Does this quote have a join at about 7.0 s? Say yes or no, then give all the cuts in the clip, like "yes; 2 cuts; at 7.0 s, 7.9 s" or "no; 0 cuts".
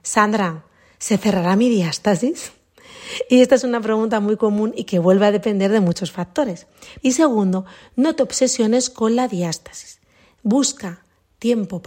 yes; 1 cut; at 7.0 s